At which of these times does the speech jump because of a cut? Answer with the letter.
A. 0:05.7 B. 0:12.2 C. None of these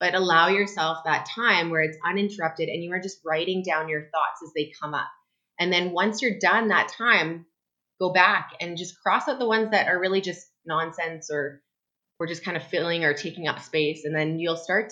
C